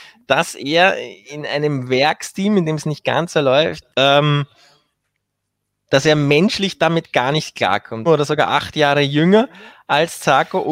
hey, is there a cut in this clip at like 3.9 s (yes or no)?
yes